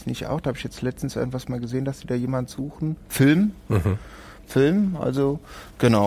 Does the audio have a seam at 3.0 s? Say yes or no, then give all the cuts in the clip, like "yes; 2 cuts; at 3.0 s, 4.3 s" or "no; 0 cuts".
no; 0 cuts